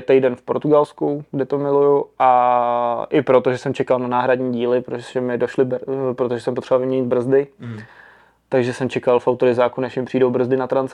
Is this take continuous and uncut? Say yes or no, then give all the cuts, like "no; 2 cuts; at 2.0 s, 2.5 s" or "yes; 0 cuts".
yes; 0 cuts